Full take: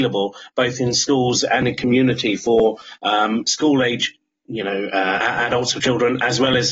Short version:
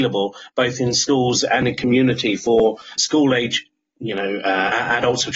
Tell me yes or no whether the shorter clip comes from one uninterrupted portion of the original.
no